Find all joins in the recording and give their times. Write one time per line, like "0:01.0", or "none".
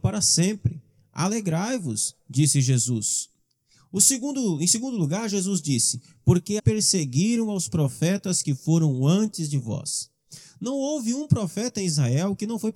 0:06.6